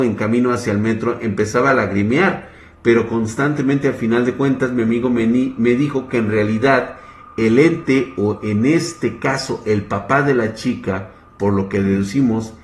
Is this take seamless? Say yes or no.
yes